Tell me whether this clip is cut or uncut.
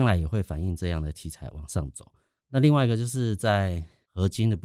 uncut